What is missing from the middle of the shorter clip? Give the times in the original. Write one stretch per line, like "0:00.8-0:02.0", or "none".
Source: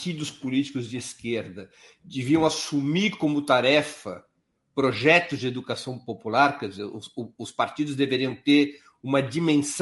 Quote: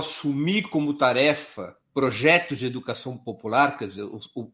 0:04.3-0:04.6